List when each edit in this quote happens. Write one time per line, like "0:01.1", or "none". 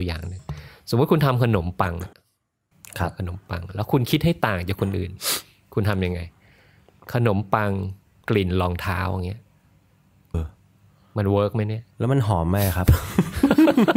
0:10.3
0:11.9